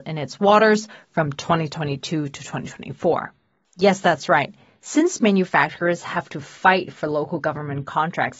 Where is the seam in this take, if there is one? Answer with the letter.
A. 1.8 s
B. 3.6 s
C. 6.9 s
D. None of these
B